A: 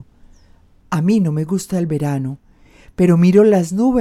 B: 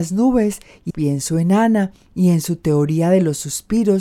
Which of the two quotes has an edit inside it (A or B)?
B